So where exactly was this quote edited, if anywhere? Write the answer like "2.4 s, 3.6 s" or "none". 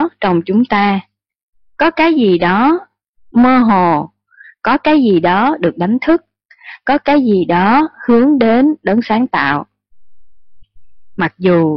none